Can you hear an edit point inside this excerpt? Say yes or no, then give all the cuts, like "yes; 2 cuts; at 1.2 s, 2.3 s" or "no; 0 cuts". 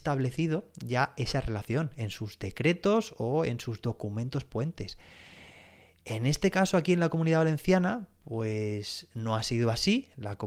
no; 0 cuts